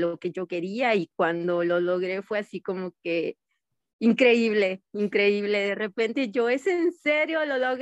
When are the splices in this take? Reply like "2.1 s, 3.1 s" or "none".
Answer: none